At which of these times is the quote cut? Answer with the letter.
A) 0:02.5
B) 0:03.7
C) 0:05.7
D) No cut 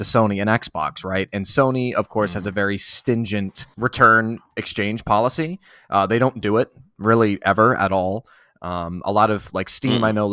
B